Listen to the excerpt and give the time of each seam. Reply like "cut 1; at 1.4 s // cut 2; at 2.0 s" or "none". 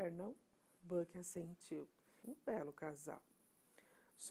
cut 1; at 2.2 s